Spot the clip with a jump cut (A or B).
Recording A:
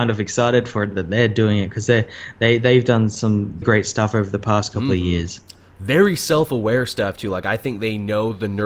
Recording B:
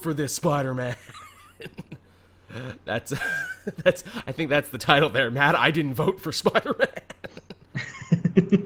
A